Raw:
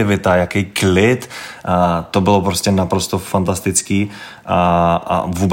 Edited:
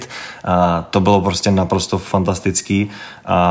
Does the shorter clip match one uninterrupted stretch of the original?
yes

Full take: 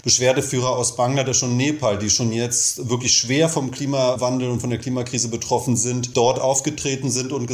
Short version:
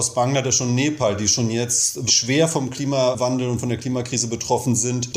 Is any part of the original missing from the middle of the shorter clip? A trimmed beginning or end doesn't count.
yes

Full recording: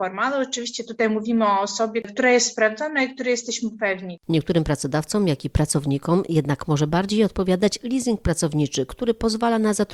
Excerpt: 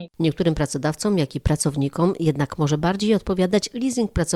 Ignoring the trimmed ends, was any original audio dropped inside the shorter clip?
no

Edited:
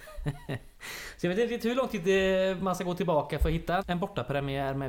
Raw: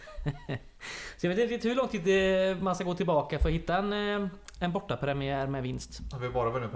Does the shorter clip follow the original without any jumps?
no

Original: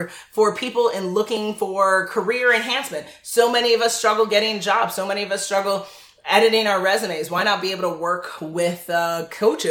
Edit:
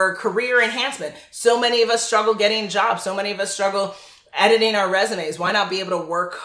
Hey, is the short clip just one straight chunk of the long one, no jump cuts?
yes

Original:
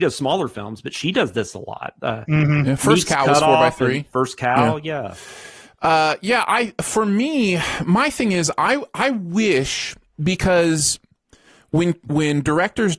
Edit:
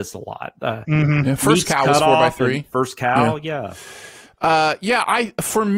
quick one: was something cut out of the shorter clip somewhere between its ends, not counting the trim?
no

